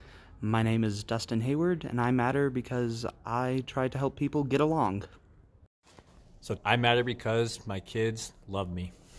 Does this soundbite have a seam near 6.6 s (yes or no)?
yes